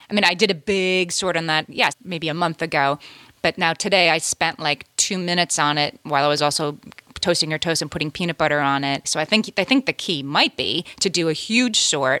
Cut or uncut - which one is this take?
cut